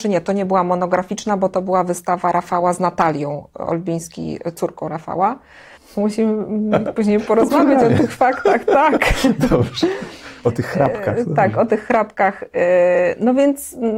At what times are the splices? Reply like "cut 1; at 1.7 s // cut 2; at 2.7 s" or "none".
cut 1; at 5.8 s